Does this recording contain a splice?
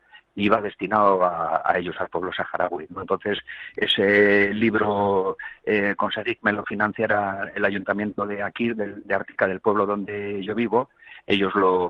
yes; 1 cut; at 2.9 s

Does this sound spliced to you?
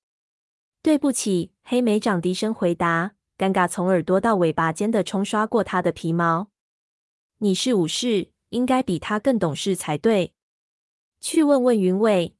no; 0 cuts

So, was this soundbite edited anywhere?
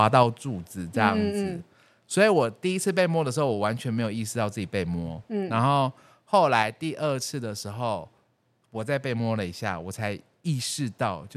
no; 0 cuts

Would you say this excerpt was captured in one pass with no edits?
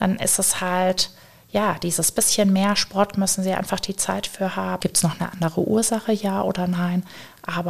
no; 1 cut; at 4.8 s

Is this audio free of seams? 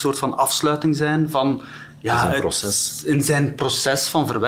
yes; 0 cuts

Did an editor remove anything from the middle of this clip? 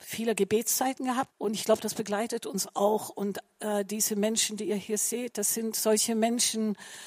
yes; 1 cut; at 1.3 s

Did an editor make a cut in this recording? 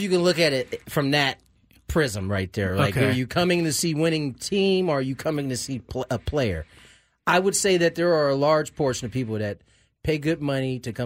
no; 0 cuts

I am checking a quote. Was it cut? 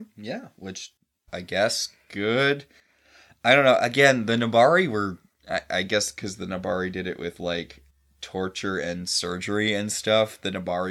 yes; 1 cut; at 1.3 s

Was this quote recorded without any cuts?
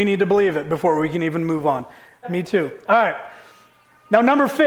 no; 1 cut; at 2.2 s

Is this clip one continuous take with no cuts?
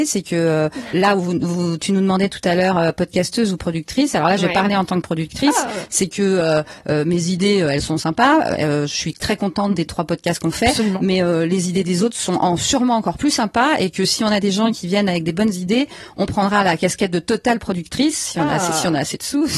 yes; 0 cuts

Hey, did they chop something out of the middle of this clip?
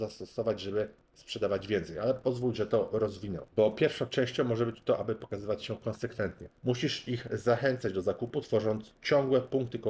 yes; 1 cut; at 6.5 s

